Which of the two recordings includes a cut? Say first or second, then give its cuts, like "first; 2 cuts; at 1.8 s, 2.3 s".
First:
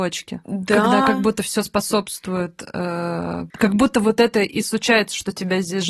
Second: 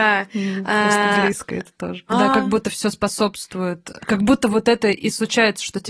second; 2 cuts; at 2.1 s, 4.0 s